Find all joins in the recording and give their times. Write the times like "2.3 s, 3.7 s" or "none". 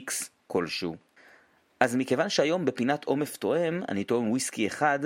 none